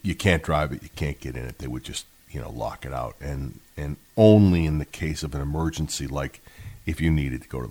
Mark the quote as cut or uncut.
uncut